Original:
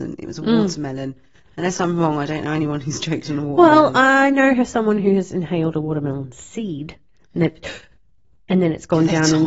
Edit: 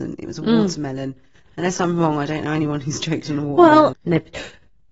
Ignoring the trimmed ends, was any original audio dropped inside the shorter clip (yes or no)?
yes